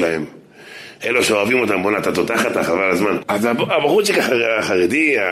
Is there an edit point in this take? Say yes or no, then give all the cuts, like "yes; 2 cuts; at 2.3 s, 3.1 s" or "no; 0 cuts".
yes; 2 cuts; at 1.0 s, 3.2 s